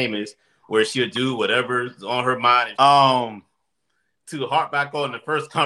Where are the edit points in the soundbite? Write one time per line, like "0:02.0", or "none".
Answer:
0:01.1
0:02.7